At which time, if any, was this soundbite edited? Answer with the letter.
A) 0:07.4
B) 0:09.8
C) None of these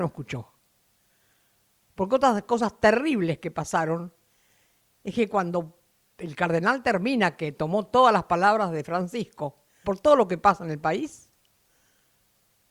B